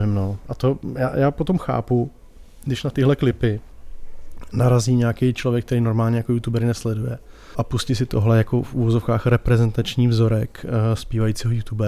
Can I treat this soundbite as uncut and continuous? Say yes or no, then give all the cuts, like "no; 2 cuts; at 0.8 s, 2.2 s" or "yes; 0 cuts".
no; 1 cut; at 7.5 s